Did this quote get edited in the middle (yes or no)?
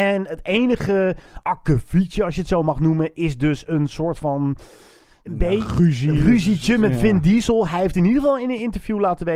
no